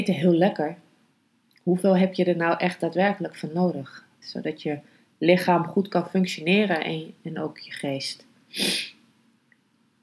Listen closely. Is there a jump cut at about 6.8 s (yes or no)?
no